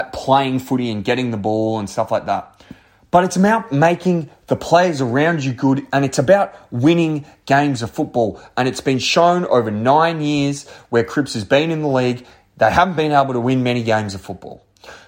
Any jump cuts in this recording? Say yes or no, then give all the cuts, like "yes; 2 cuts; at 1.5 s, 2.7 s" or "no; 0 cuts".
no; 0 cuts